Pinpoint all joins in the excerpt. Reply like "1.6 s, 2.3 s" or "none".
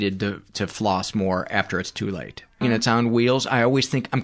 2.6 s